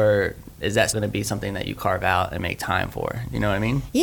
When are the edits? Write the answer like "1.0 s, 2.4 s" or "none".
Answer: 0.9 s